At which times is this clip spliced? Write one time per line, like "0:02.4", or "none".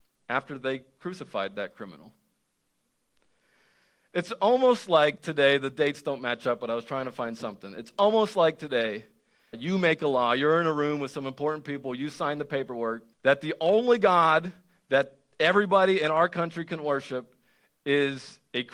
0:09.5
0:13.1